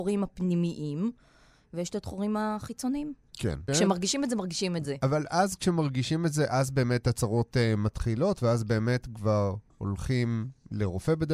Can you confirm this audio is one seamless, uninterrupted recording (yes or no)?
no